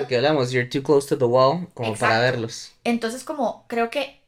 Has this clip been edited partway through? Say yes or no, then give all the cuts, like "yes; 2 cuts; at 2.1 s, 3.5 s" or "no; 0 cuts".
no; 0 cuts